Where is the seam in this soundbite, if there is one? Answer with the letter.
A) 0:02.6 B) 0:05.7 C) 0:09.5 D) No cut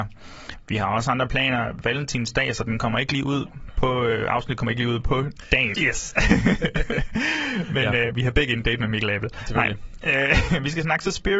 B